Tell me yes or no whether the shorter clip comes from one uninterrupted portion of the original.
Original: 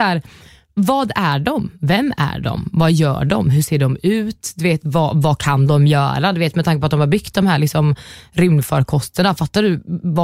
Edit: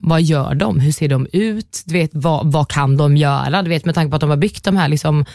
yes